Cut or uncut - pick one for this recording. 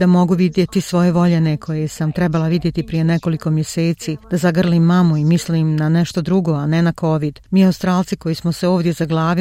uncut